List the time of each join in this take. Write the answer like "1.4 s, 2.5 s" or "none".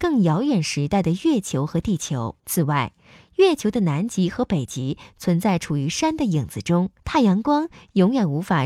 2.4 s, 7.0 s